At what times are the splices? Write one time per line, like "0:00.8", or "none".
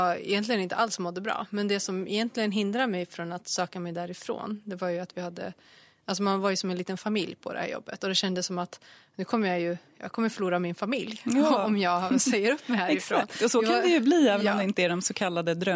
none